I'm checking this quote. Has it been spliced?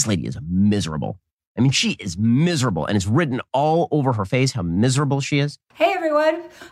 no; 0 cuts

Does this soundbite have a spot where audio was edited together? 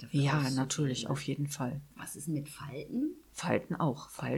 yes; 1 cut; at 1.9 s

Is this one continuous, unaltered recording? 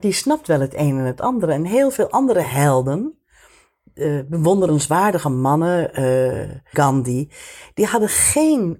no; 1 cut; at 6.7 s

